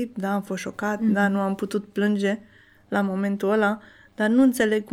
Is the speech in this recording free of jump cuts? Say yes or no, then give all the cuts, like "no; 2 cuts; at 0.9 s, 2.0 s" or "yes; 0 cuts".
yes; 0 cuts